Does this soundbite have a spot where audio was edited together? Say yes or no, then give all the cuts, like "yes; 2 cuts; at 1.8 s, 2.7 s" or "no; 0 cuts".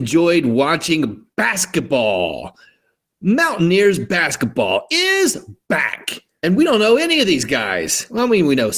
no; 0 cuts